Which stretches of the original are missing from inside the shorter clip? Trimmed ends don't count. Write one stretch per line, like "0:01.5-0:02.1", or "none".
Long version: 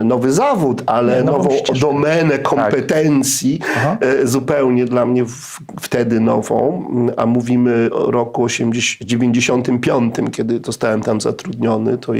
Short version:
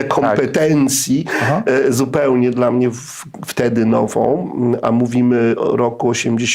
none